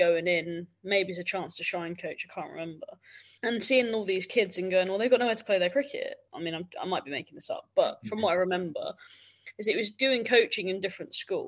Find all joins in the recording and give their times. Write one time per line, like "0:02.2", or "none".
0:03.4
0:06.3